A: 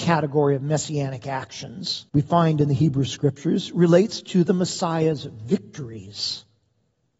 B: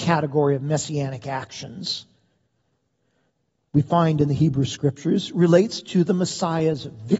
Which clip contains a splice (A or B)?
A